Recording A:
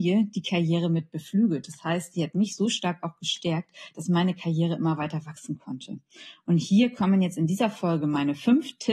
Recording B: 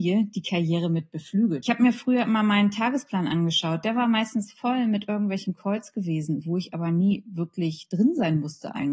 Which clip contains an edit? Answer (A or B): B